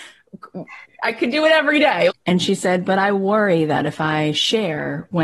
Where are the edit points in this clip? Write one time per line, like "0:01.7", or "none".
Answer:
0:02.1